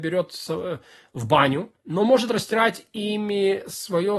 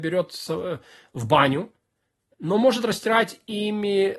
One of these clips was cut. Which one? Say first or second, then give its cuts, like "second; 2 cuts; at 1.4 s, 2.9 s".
first; 1 cut; at 1.8 s